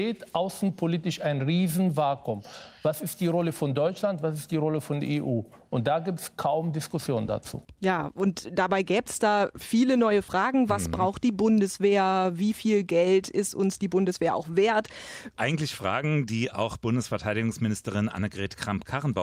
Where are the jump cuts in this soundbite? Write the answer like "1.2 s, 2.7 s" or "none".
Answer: 15.3 s